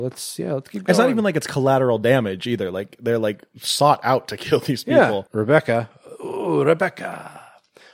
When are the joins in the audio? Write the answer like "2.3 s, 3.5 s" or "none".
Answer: 5.3 s